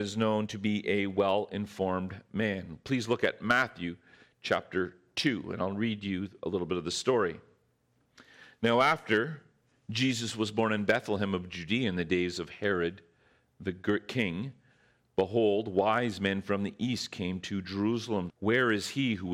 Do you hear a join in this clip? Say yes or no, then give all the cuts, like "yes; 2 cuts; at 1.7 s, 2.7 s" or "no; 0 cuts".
yes; 1 cut; at 18.3 s